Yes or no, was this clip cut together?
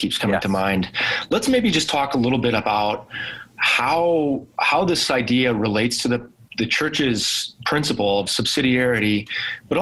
no